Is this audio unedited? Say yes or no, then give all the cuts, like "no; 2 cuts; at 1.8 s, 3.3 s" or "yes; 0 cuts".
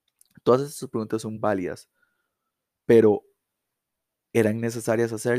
no; 1 cut; at 1.4 s